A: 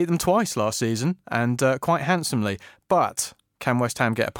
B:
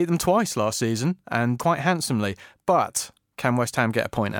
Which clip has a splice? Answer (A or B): B